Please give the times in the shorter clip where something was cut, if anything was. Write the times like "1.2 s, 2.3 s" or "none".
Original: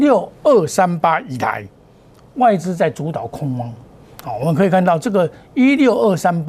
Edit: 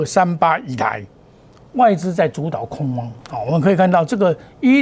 3.2 s